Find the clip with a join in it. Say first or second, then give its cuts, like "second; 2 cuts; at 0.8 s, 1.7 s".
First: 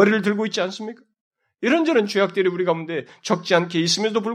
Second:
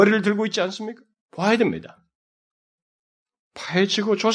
second; 1 cut; at 1.2 s